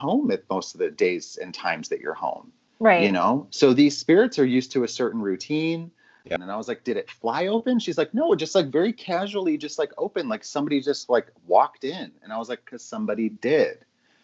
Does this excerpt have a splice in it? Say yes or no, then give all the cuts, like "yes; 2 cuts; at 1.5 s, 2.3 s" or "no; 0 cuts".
yes; 1 cut; at 6.4 s